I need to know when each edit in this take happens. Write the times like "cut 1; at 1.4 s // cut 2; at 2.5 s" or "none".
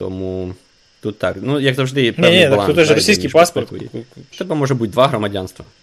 cut 1; at 4.3 s